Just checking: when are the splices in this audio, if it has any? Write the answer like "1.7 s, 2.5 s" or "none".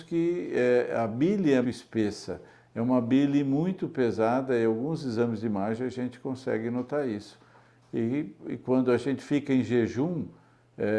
1.6 s